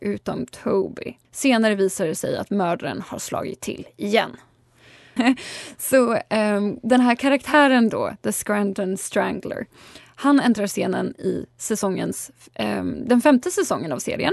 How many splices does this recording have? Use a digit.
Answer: 2